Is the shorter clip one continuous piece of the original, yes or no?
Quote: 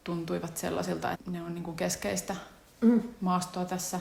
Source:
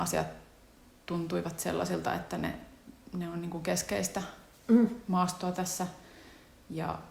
no